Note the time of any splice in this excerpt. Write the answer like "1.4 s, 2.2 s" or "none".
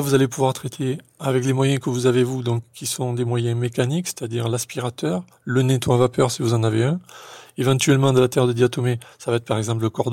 9.1 s